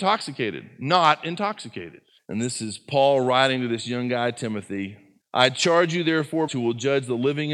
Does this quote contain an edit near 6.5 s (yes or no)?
yes